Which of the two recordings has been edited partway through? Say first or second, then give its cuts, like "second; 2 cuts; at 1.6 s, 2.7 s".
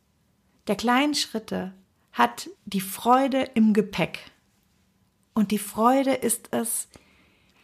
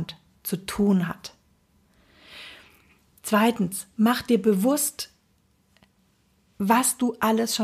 first; 1 cut; at 2.6 s